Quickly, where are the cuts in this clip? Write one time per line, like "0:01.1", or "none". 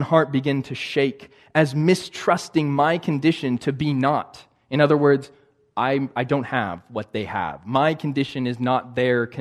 none

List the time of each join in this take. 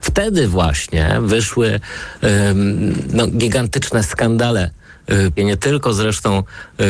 0:05.4

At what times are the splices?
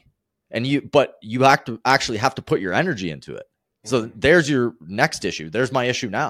none

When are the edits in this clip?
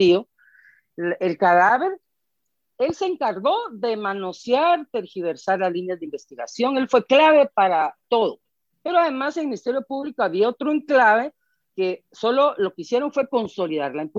none

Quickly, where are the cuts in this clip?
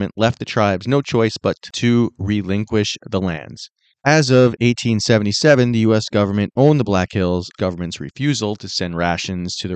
0:07.6

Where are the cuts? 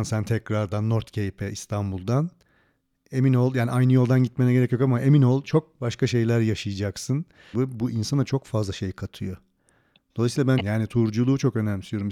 0:07.5
0:10.6

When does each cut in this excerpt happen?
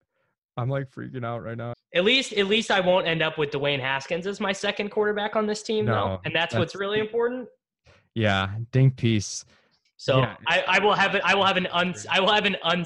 0:01.7
0:09.8

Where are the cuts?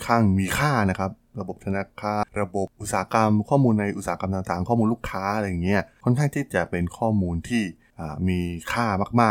0:02.2

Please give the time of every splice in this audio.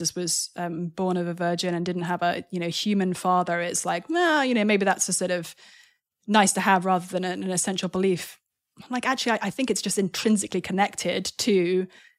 none

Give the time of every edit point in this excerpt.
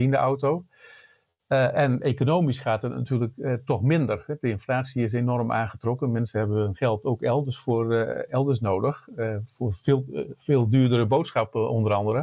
none

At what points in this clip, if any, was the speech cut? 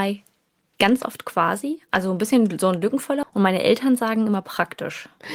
0:03.2

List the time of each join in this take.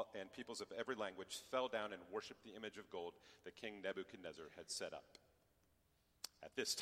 none

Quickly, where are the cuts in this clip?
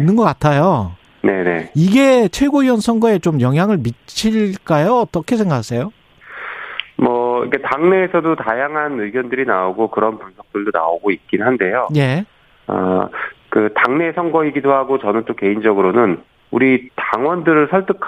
none

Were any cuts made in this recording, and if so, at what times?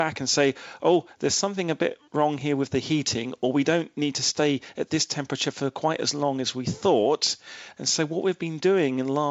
0:07.7

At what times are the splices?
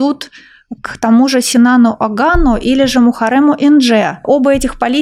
none

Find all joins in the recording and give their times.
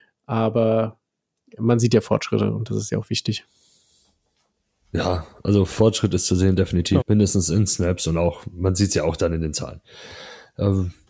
0:07.0

